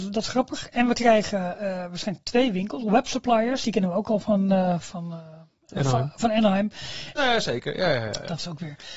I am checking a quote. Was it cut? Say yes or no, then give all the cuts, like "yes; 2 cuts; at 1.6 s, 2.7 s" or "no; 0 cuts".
yes; 1 cut; at 7.1 s